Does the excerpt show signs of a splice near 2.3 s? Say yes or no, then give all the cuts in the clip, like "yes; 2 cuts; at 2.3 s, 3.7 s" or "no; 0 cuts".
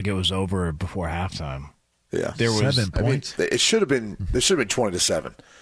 yes; 2 cuts; at 2.3 s, 3.3 s